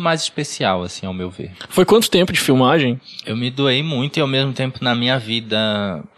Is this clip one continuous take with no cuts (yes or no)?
no